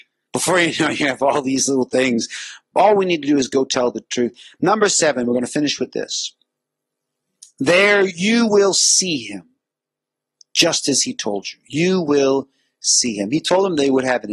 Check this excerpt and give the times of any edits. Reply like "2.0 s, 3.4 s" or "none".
none